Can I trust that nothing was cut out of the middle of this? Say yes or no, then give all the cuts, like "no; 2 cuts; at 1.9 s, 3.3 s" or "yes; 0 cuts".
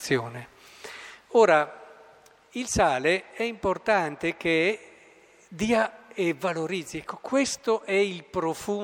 yes; 0 cuts